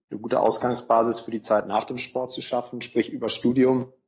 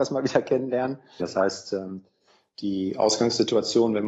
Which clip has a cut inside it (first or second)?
second